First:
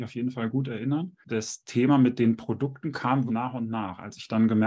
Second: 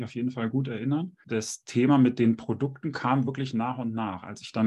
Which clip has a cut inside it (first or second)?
first